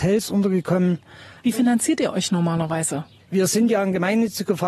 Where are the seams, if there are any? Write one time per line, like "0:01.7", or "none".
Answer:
0:01.4
0:03.2